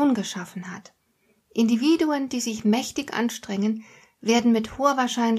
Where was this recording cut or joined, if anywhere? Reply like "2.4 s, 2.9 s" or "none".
none